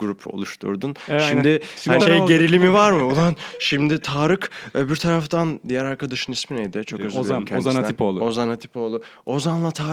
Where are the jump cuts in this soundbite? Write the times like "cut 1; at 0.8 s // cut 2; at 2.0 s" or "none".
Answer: cut 1; at 2.0 s